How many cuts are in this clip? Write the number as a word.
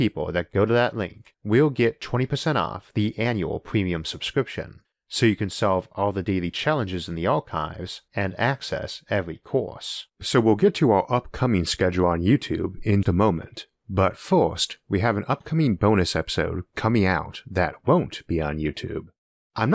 two